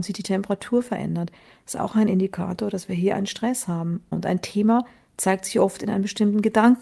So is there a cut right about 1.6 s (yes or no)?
no